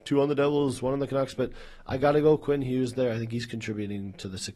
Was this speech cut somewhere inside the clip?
no; 0 cuts

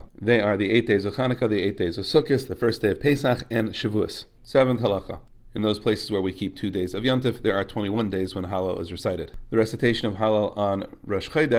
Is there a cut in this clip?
no; 0 cuts

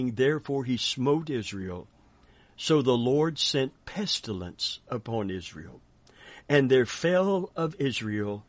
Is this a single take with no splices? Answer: yes; 0 cuts

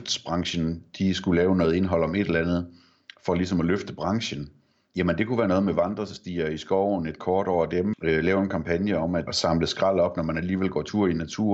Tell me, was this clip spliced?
yes; 3 cuts; at 4.9 s, 7.9 s, 9.3 s

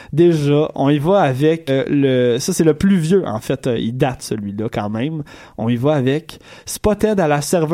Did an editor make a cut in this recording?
yes; 1 cut; at 1.7 s

